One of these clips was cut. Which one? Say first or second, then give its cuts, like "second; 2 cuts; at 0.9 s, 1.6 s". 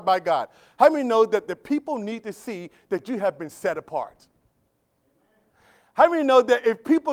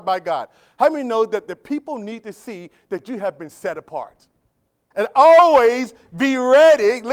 second; 1 cut; at 4.9 s